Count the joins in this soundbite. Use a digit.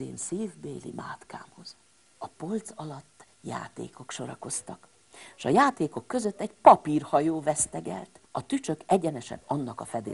2